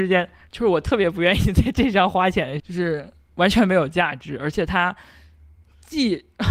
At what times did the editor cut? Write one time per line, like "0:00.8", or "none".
0:02.6

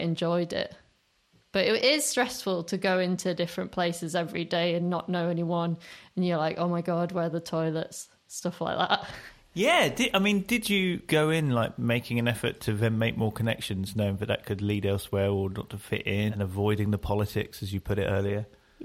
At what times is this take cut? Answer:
none

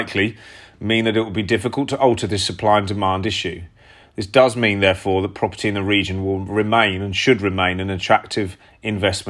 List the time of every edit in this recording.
none

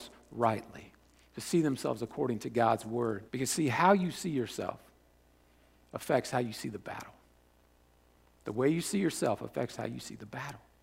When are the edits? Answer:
0:03.3

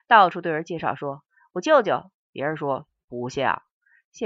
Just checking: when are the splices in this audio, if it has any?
0:02.2

